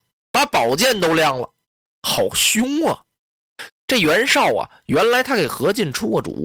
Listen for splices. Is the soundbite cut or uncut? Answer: cut